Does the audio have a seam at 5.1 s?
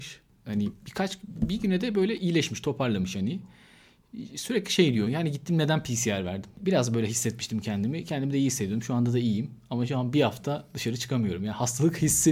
no; 0 cuts

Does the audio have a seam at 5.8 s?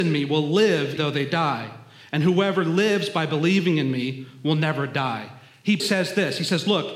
yes; 2 cuts; at 1.0 s, 5.8 s

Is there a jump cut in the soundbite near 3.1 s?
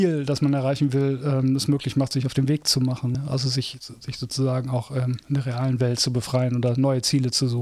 no; 0 cuts

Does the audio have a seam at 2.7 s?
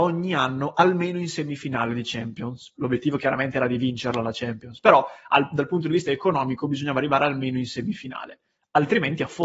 yes; 1 cut; at 2.7 s

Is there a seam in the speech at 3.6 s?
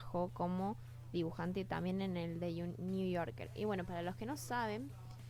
no; 0 cuts

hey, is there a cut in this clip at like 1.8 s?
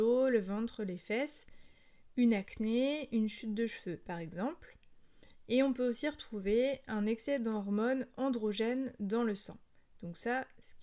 no; 0 cuts

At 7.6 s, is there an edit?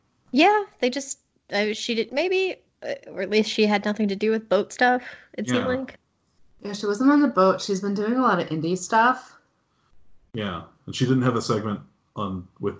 no; 1 cut; at 2.1 s

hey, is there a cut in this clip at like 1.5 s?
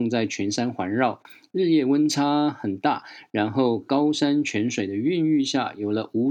no; 0 cuts

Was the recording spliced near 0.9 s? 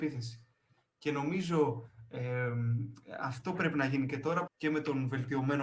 no; 1 cut; at 4.5 s

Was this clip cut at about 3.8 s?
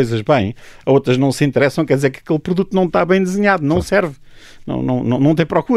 no; 0 cuts

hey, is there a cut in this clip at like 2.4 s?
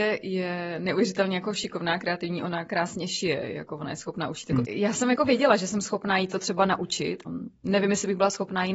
no; 2 cuts; at 4.6 s, 7.3 s

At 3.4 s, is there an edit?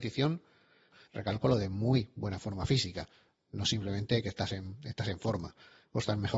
no; 1 cut; at 1.1 s

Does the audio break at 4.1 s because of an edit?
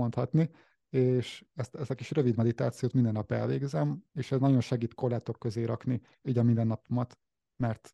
yes; 1 cut; at 4.1 s

